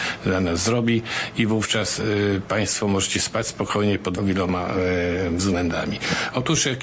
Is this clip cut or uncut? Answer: cut